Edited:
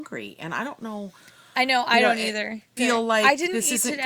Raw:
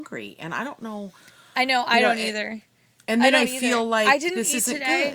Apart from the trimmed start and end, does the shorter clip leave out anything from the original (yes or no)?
yes